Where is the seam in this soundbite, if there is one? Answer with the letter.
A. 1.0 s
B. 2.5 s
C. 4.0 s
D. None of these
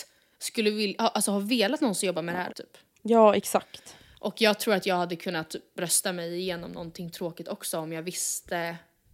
B